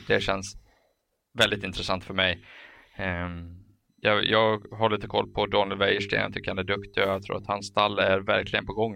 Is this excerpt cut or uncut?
uncut